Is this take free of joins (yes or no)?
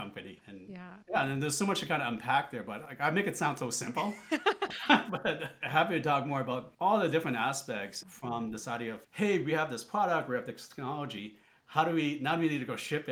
no